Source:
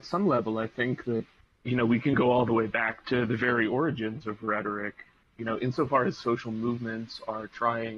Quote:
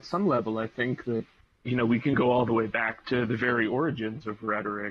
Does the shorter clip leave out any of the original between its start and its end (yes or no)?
no